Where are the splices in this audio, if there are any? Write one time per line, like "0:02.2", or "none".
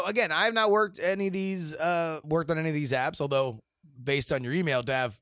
0:02.2